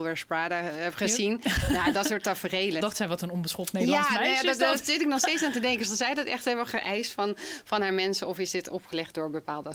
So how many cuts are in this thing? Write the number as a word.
one